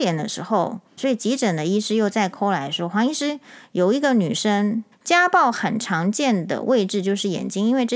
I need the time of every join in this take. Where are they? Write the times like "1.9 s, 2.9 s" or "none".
1.0 s, 4.9 s